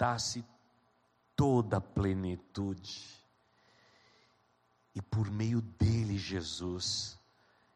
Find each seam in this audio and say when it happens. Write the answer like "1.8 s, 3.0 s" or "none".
none